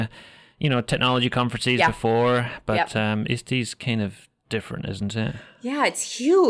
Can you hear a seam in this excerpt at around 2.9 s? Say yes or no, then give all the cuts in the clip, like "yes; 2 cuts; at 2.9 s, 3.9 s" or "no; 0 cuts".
no; 0 cuts